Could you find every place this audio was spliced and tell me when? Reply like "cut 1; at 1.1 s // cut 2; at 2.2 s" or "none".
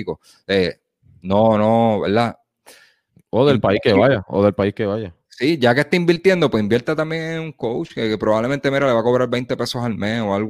none